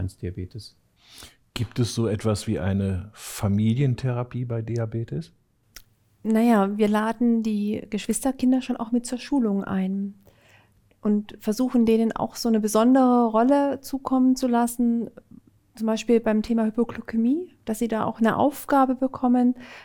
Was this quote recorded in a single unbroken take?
yes; 0 cuts

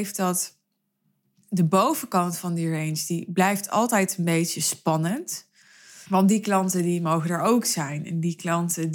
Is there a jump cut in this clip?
yes; 1 cut; at 6.1 s

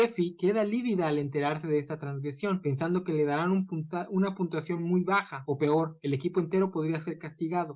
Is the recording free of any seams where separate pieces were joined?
yes; 0 cuts

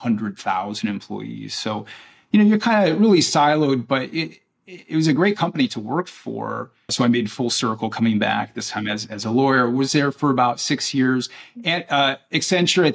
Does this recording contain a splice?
yes; 1 cut; at 6.9 s

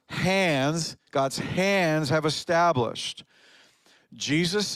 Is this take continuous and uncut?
yes; 0 cuts

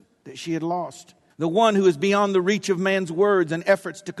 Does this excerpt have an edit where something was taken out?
yes; 1 cut; at 1.3 s

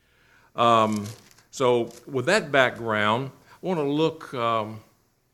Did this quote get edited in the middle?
no; 0 cuts

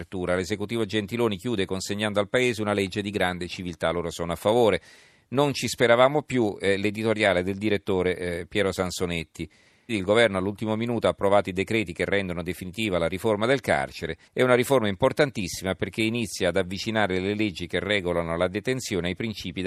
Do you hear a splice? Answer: yes; 2 cuts; at 9.9 s, 14.3 s

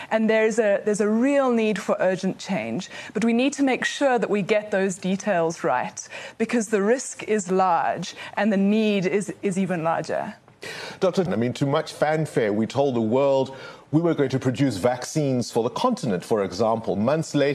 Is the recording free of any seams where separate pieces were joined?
no; 1 cut; at 11.3 s

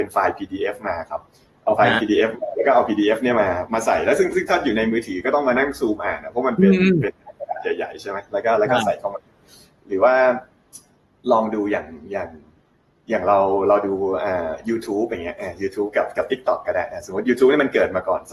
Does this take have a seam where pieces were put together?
no; 0 cuts

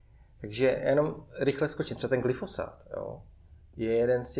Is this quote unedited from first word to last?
yes; 0 cuts

